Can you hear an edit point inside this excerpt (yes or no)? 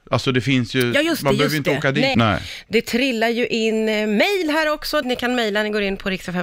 yes